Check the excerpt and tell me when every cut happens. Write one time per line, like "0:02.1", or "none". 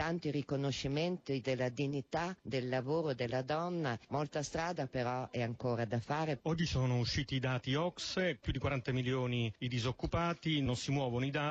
none